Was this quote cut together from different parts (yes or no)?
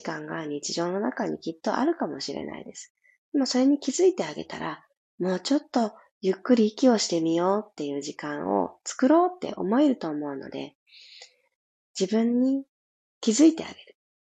yes